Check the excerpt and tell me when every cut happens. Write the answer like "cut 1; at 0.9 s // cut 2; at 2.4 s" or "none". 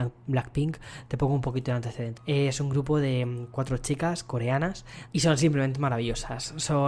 cut 1; at 2.2 s // cut 2; at 5.1 s